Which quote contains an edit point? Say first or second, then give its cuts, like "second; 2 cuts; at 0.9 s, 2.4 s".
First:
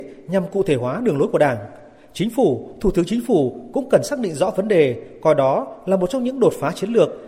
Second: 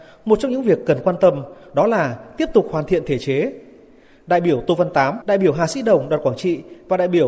second; 1 cut; at 5.2 s